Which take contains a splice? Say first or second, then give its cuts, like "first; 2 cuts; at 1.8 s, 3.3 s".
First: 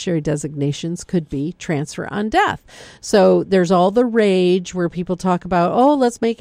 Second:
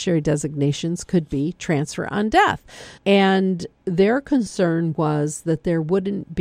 second; 1 cut; at 3.0 s